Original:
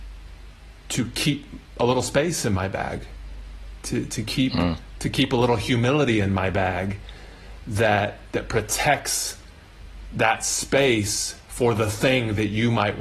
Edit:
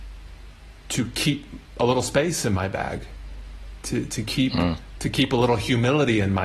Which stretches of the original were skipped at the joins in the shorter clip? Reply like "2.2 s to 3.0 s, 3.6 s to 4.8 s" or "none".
none